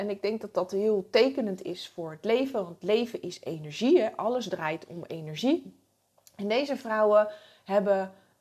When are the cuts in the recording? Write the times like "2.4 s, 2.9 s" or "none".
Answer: none